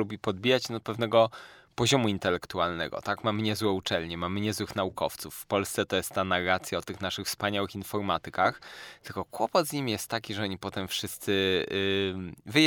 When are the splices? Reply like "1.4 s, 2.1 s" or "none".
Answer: none